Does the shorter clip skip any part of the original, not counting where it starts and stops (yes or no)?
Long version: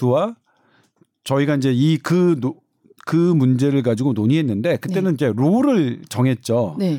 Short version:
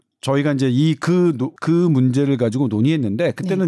yes